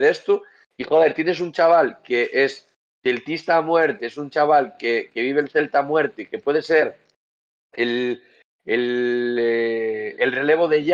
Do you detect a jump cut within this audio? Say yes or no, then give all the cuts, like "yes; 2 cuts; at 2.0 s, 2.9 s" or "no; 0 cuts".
no; 0 cuts